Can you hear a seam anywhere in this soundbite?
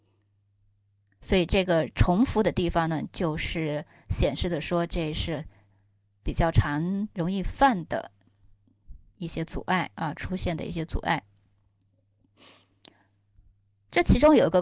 no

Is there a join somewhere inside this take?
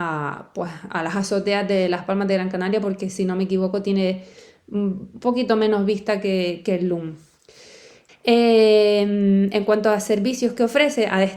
yes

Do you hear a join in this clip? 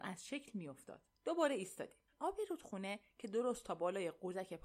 yes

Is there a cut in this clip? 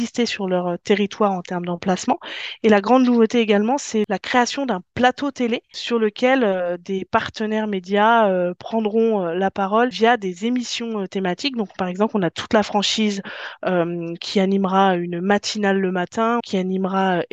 yes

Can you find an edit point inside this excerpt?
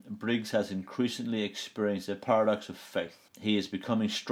yes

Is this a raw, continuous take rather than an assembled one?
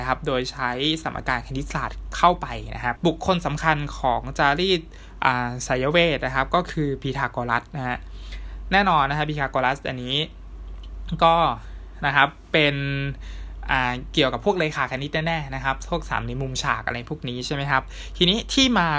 no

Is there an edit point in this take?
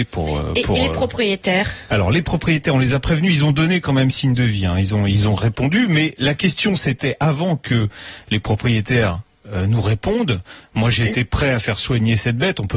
no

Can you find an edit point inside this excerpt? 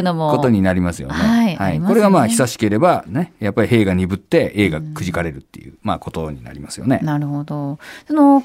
no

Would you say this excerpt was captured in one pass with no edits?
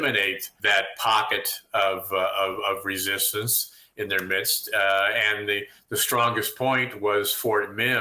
yes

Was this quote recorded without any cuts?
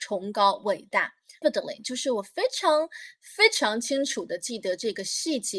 no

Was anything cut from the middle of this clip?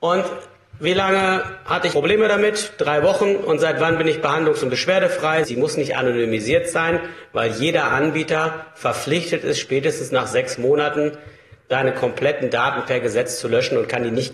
yes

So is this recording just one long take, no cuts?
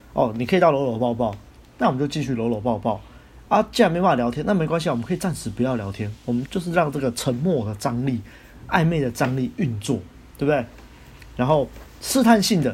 no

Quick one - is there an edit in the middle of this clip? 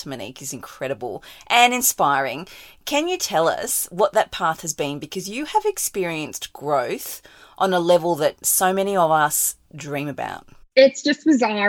no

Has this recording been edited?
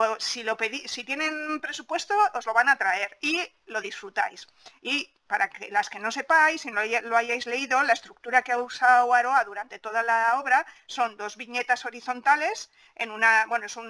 no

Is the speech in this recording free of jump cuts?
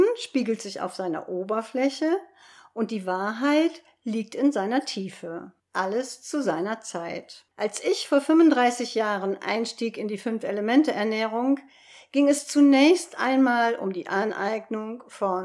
no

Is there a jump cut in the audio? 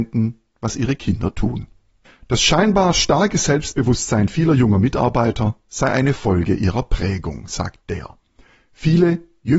yes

